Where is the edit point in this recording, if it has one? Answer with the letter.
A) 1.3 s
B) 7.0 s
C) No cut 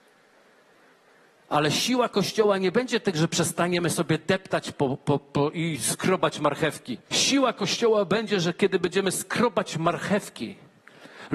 B